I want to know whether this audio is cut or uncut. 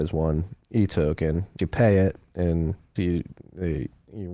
cut